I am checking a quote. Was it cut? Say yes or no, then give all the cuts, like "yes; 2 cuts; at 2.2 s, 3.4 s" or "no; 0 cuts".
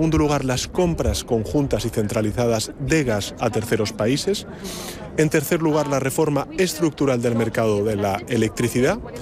no; 0 cuts